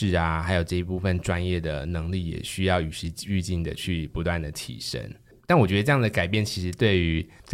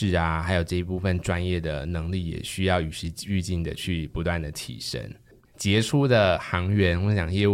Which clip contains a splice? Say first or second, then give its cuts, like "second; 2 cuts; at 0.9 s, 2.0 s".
second; 1 cut; at 5.5 s